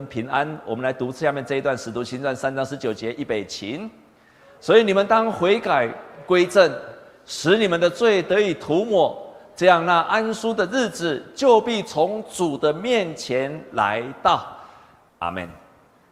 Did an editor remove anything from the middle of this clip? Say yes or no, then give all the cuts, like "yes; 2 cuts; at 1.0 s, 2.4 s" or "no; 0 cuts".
yes; 1 cut; at 15.1 s